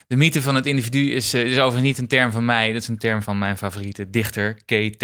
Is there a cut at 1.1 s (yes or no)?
no